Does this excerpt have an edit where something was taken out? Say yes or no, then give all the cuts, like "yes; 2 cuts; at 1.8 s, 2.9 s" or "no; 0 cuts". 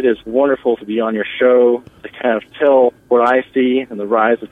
yes; 1 cut; at 3.0 s